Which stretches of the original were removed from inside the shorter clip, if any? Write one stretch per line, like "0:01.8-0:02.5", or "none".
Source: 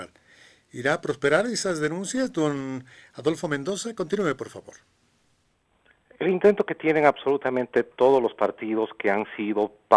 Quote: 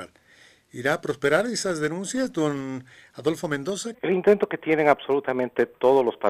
0:03.9-0:06.1